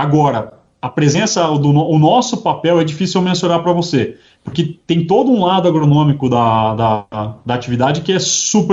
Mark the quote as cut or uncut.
uncut